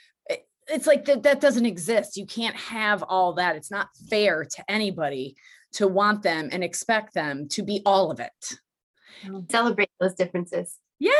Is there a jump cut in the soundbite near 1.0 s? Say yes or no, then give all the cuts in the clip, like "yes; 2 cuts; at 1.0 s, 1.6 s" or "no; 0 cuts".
no; 1 cut; at 9.5 s